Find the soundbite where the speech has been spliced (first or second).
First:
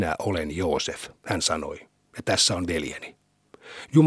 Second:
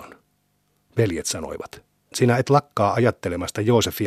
second